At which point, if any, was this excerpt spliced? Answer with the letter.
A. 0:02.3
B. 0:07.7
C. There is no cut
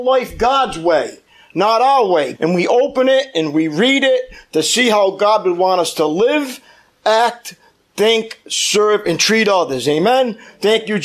A